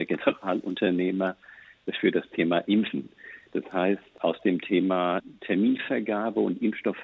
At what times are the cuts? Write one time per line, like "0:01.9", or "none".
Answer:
none